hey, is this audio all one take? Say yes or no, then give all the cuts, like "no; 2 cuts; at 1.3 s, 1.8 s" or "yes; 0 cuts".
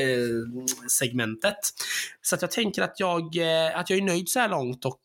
no; 1 cut; at 2.2 s